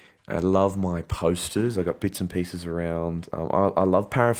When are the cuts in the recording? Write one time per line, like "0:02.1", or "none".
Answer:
none